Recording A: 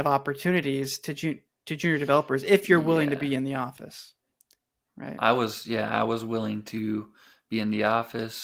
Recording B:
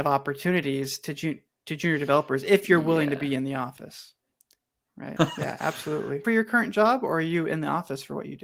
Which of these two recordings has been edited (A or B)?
B